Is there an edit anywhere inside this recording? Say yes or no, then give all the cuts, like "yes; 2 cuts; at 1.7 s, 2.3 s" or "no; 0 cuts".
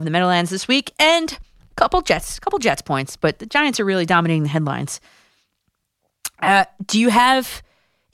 no; 0 cuts